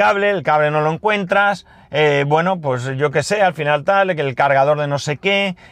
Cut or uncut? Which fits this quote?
uncut